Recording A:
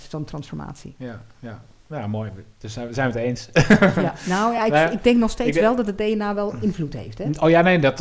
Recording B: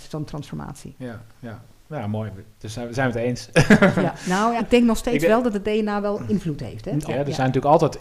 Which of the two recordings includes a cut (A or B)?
B